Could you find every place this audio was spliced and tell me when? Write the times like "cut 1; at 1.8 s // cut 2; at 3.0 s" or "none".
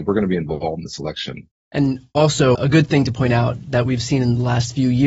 cut 1; at 1.5 s // cut 2; at 2.5 s